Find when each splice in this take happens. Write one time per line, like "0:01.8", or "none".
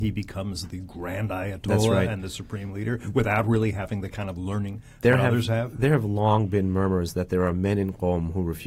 none